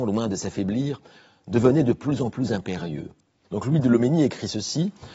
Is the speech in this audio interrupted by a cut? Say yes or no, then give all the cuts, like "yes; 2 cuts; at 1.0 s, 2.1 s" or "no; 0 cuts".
yes; 1 cut; at 3.4 s